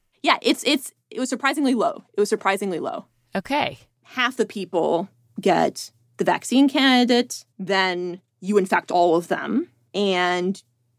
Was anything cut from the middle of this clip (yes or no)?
yes